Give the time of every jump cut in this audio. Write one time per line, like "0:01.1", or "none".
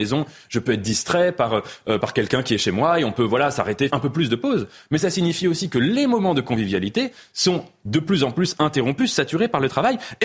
0:02.0
0:03.9